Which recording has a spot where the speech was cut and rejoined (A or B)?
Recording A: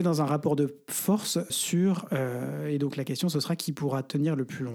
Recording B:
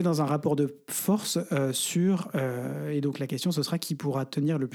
A